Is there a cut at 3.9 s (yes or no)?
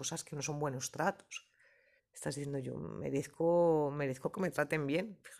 no